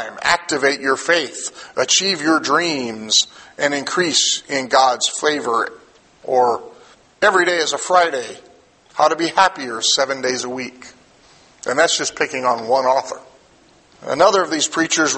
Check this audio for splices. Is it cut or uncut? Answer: uncut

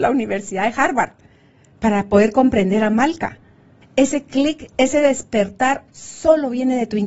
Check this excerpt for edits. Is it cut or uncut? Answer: cut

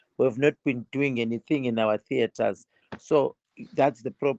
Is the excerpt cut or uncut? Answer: cut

